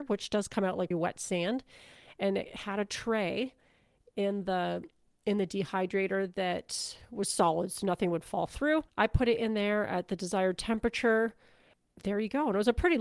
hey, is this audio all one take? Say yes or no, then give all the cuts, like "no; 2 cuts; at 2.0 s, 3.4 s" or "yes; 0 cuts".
no; 2 cuts; at 0.9 s, 8.9 s